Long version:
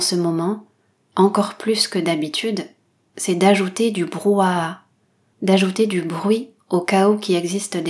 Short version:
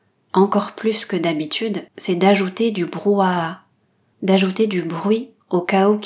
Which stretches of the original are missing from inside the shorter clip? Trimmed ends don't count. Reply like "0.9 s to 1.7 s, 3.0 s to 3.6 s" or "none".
2.7 s to 3.1 s